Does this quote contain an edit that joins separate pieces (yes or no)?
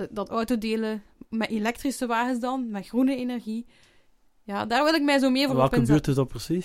no